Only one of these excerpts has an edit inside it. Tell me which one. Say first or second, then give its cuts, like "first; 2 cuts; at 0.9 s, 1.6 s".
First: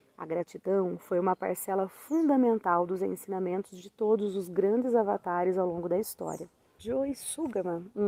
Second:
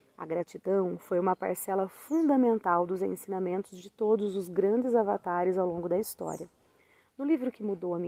first; 1 cut; at 6.8 s